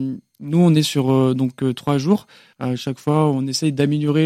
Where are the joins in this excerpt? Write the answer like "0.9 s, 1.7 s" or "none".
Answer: 2.5 s